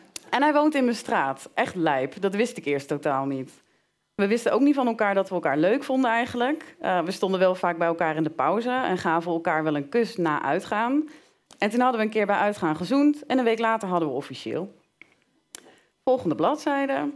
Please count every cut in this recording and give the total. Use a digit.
1